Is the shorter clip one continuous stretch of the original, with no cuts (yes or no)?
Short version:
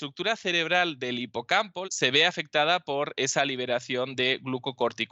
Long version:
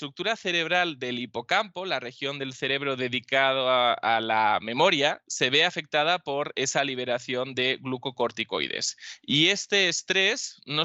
no